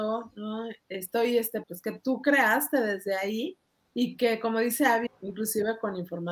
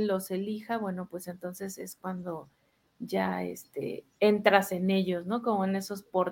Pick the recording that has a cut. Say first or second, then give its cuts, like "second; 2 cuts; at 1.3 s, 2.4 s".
first; 2 cuts; at 1.6 s, 5.1 s